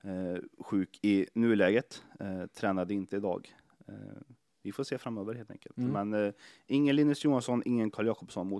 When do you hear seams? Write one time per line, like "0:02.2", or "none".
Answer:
none